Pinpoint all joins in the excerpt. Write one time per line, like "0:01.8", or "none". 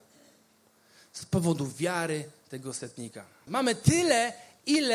0:03.5